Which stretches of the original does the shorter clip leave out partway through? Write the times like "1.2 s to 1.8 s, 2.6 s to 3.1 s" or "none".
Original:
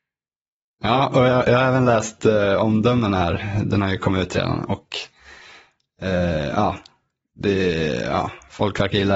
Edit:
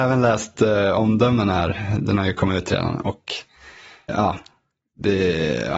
5.7 s to 6.5 s